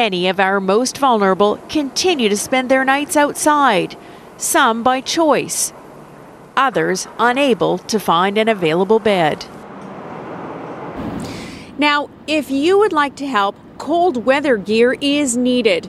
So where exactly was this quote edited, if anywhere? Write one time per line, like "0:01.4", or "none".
none